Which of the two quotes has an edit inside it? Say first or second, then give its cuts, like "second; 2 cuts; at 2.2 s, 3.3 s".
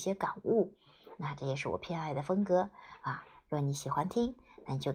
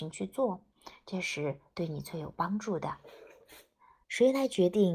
second; 1 cut; at 4.0 s